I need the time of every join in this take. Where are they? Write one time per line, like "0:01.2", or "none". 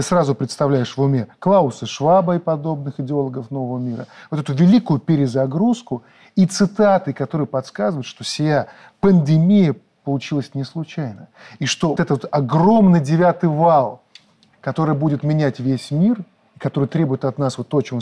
0:12.0